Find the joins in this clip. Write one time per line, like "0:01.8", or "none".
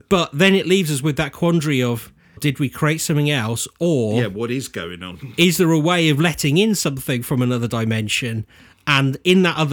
0:02.4